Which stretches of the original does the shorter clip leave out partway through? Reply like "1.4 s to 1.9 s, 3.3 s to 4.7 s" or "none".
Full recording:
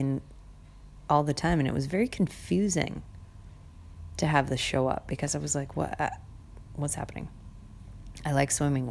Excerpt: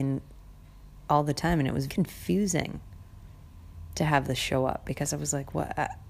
1.9 s to 2.1 s